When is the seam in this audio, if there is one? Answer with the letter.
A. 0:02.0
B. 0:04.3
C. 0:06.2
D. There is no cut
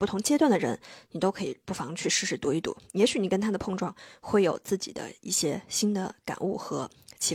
D